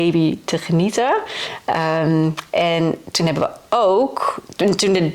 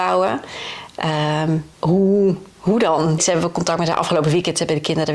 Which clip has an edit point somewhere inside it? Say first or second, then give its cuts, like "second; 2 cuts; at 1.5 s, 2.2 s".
second; 2 cuts; at 1.7 s, 3.2 s